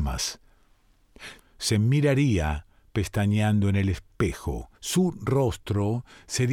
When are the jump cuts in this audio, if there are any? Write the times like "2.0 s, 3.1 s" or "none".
1.4 s, 4.7 s